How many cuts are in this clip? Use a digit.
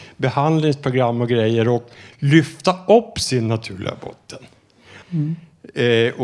1